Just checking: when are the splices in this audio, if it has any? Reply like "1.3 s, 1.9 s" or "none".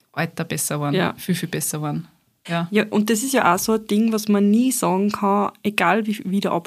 2.5 s